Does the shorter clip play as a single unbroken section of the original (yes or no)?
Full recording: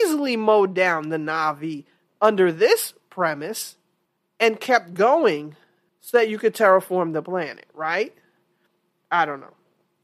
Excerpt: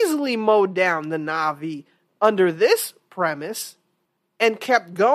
yes